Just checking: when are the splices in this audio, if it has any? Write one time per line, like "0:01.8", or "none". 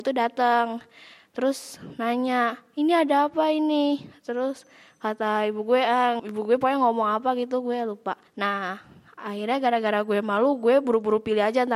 0:06.2
0:08.3